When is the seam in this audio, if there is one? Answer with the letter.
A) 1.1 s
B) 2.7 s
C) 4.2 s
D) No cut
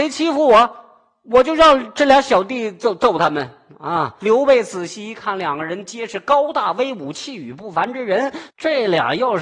C